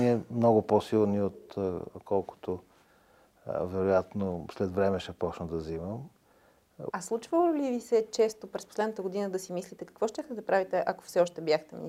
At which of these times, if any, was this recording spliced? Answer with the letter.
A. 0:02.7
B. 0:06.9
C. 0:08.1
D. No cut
B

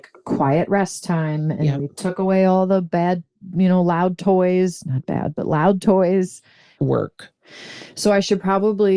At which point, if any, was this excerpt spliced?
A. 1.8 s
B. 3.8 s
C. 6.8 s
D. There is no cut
C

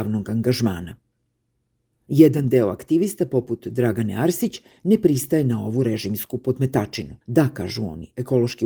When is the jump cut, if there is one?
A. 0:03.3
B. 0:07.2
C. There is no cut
B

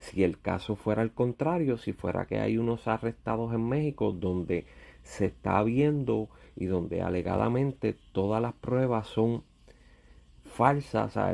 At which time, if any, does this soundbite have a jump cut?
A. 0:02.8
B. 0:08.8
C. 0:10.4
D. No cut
D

